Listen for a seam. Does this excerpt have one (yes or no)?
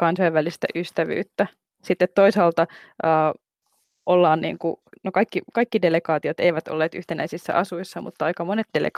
yes